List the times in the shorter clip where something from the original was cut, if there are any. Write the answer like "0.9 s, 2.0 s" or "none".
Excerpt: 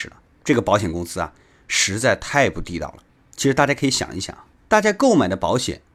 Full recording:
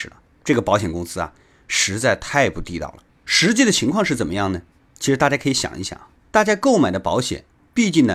3.2 s